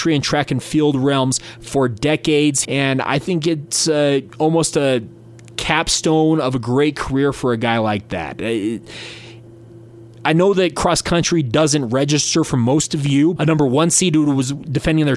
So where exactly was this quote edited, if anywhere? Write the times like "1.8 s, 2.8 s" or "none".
2.6 s, 13.4 s